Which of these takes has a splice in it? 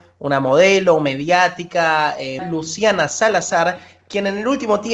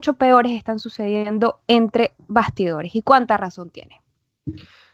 first; 1 cut; at 2.4 s

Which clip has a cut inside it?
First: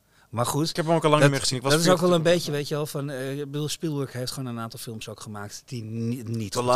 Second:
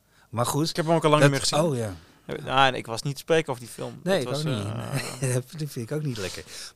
second; 1 cut; at 1.5 s

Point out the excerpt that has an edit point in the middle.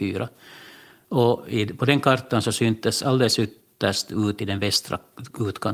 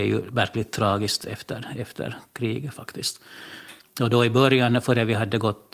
second; 2 cuts; at 2.7 s, 3.8 s

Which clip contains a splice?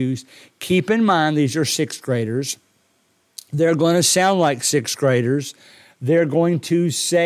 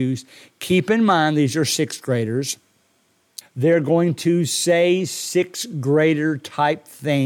second; 1 cut; at 3.4 s

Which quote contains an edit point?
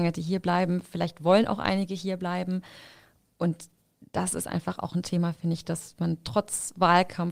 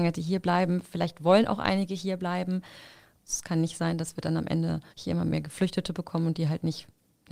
second; 2 cuts; at 3.2 s, 4.9 s

